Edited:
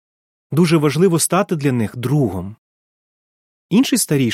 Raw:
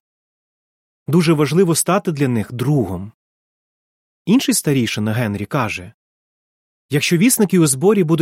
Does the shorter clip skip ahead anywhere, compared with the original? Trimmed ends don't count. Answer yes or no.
no